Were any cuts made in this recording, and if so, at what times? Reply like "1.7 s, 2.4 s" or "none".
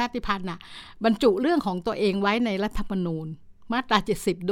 none